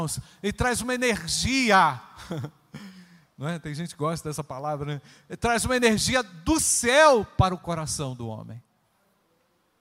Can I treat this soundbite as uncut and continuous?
yes; 0 cuts

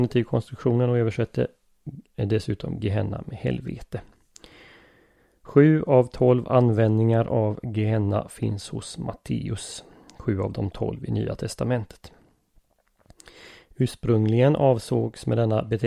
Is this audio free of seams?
yes; 0 cuts

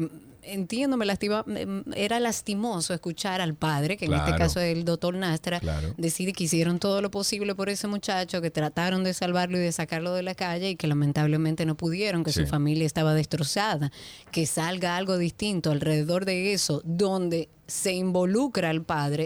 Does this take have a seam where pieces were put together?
no; 0 cuts

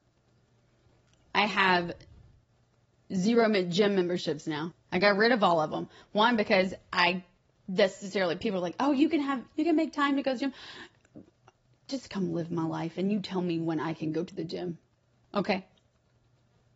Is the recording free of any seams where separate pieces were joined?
no; 1 cut; at 4.7 s

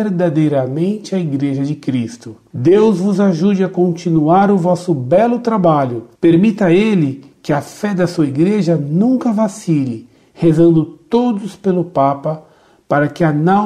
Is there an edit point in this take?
no; 0 cuts

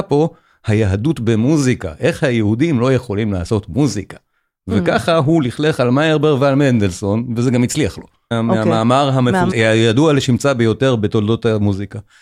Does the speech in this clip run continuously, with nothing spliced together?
no; 2 cuts; at 8.3 s, 9.5 s

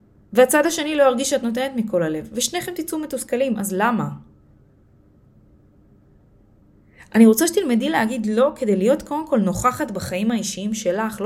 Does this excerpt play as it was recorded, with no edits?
yes; 0 cuts

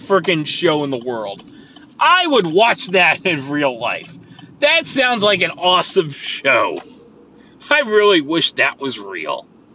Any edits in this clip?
no; 0 cuts

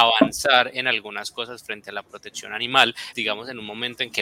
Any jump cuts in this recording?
yes; 1 cut; at 3.1 s

